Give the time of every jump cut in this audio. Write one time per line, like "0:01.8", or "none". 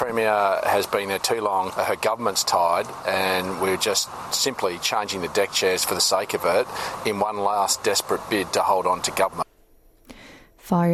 0:01.7